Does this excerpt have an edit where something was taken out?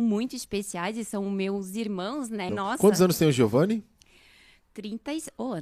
yes; 1 cut; at 2.5 s

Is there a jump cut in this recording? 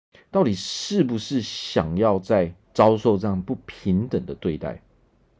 yes; 1 cut; at 2.6 s

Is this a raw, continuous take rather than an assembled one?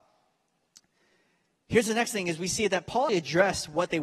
no; 1 cut; at 3.1 s

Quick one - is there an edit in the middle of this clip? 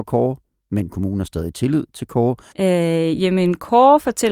yes; 1 cut; at 2.5 s

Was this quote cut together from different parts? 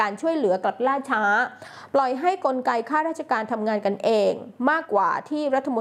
yes; 1 cut; at 4.8 s

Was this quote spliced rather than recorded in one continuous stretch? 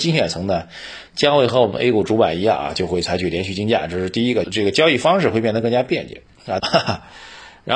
yes; 2 cuts; at 4.4 s, 6.6 s

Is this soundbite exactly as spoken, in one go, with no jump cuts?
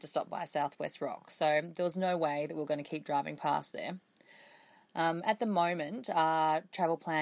yes; 0 cuts

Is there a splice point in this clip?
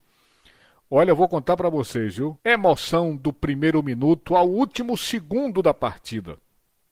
yes; 1 cut; at 2.4 s

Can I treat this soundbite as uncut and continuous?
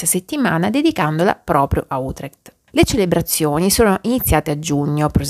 no; 1 cut; at 2.7 s

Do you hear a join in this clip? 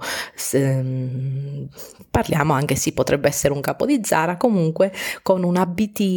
no; 0 cuts

